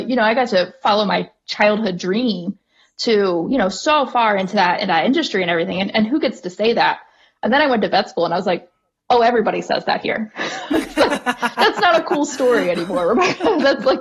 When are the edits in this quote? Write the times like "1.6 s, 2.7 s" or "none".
none